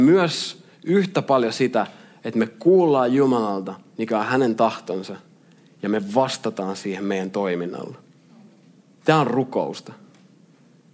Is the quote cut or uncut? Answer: uncut